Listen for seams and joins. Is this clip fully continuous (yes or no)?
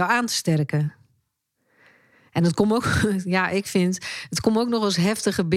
yes